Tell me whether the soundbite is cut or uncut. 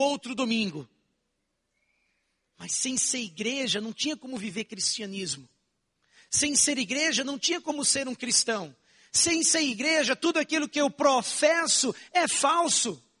uncut